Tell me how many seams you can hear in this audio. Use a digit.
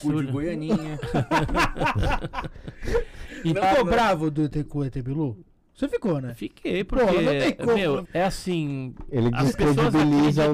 2